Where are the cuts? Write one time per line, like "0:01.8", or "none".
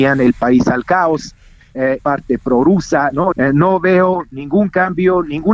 0:02.0
0:03.3

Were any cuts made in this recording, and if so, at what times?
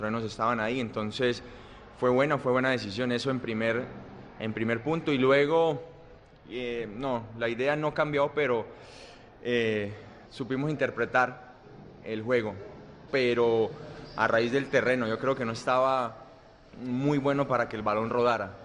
0:10.3
0:12.0
0:13.1

